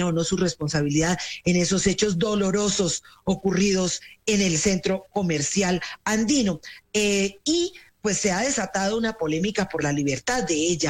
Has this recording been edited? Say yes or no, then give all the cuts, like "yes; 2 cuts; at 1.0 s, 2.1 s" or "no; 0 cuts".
yes; 1 cut; at 6.8 s